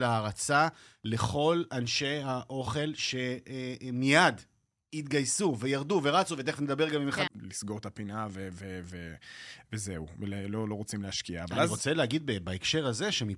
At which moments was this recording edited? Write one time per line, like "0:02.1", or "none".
0:07.3